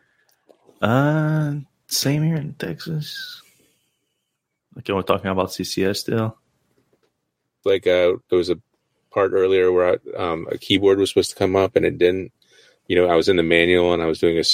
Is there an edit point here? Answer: yes; 1 cut; at 7.6 s

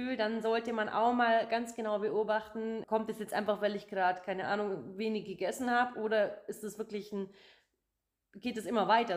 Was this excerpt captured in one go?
no; 1 cut; at 2.8 s

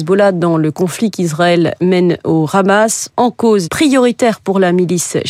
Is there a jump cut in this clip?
yes; 1 cut; at 3.7 s

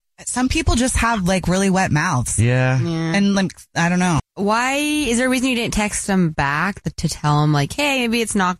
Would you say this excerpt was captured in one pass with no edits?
no; 1 cut; at 4.2 s

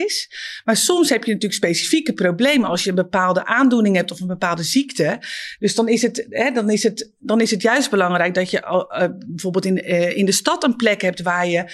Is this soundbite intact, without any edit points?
no; 1 cut; at 5.6 s

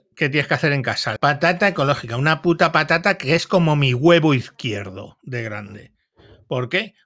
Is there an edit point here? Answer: yes; 1 cut; at 1.2 s

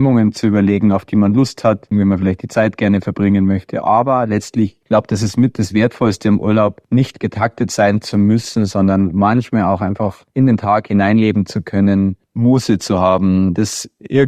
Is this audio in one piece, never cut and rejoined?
no; 1 cut; at 1.9 s

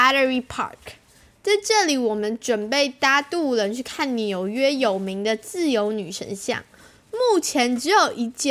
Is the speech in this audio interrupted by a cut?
no; 0 cuts

